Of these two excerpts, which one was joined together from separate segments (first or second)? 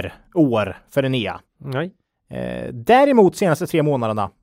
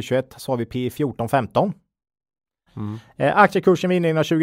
second